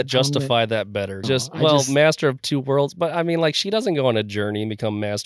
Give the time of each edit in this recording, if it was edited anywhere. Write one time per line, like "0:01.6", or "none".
0:01.2